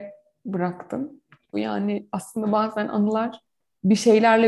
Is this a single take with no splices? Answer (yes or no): no